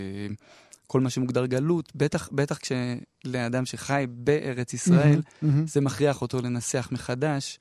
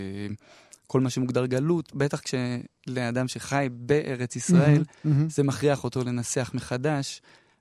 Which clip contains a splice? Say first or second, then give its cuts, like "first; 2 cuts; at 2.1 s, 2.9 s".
second; 1 cut; at 1.9 s